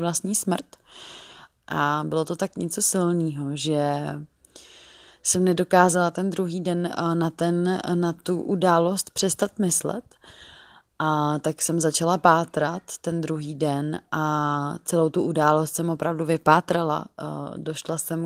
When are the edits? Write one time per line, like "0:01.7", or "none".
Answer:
0:01.6